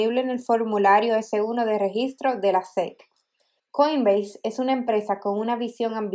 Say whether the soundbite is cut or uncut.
cut